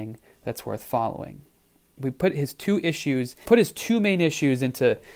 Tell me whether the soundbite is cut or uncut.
cut